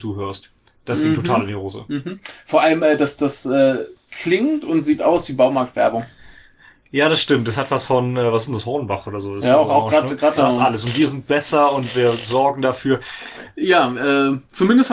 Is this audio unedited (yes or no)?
no